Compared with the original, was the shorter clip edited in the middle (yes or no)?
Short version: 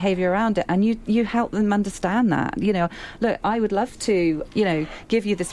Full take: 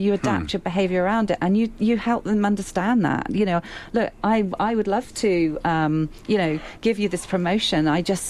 yes